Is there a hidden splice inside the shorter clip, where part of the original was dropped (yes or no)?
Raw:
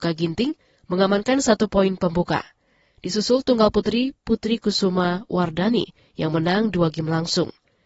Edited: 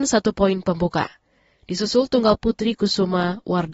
yes